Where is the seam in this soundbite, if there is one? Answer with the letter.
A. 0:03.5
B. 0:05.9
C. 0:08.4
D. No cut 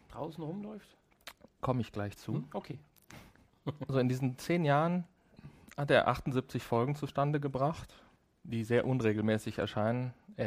A